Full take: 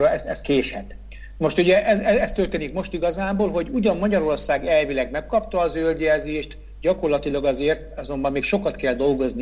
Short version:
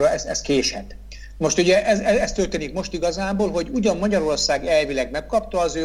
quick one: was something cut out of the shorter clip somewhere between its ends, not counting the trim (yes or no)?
no